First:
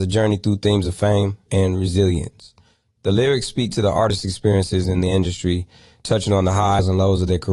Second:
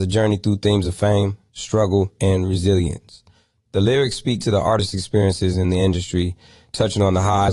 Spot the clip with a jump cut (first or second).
first